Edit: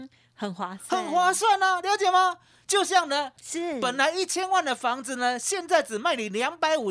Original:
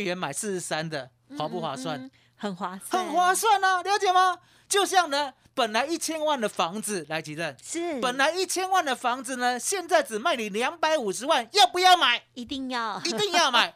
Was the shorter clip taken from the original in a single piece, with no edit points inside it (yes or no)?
no